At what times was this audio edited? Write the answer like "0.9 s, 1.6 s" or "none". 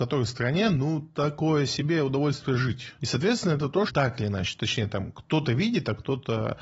3.9 s

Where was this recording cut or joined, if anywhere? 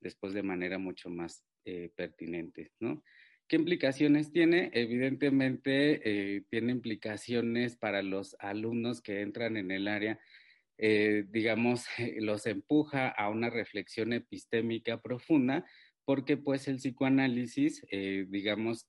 none

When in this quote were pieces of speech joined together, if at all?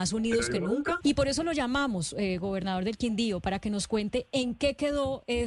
1.0 s

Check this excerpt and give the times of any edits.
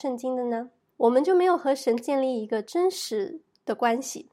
0.9 s

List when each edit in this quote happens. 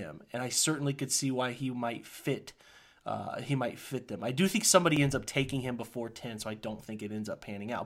none

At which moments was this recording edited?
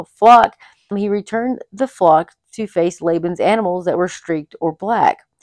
0.9 s

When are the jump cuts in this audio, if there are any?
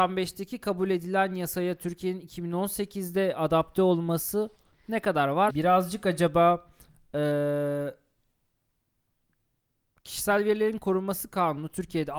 5.5 s

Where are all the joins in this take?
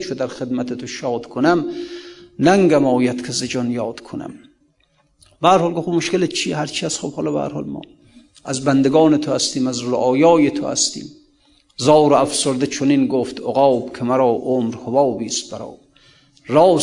none

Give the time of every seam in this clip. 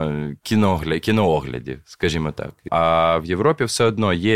2.7 s

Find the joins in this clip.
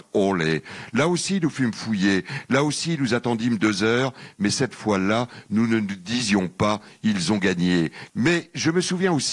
8.1 s

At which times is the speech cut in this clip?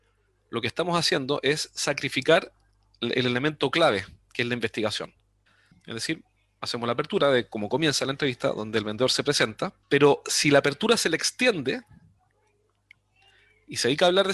5.7 s, 9.8 s

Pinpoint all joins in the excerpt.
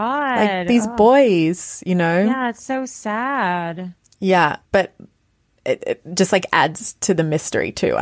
4.7 s

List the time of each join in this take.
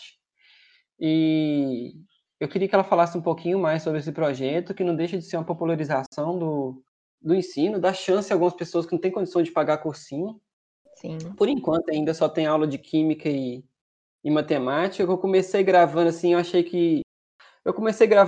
none

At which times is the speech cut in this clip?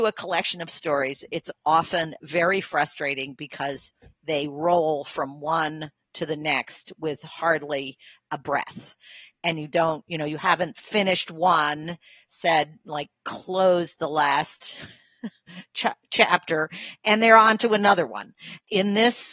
none

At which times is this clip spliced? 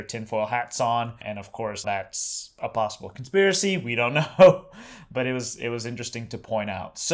1.8 s

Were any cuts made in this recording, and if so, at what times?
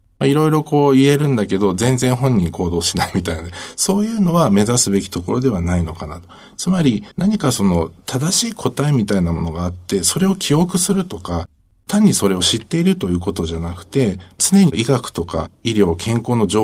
7.1 s

